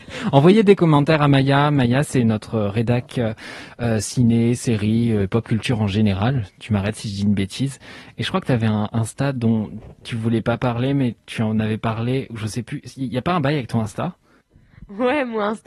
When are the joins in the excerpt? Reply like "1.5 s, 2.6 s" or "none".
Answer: none